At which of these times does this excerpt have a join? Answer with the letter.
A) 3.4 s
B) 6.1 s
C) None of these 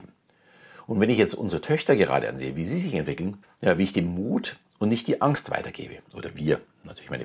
A